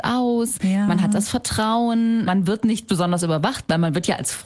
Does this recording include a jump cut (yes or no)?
yes